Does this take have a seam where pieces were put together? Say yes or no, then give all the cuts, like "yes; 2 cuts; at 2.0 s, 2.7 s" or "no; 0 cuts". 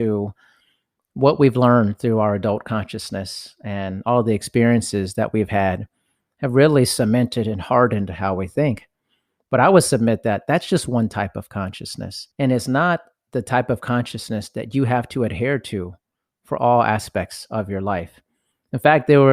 yes; 1 cut; at 12.3 s